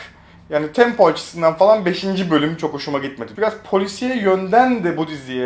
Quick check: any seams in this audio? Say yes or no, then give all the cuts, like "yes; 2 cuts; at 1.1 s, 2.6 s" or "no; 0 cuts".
yes; 1 cut; at 3.4 s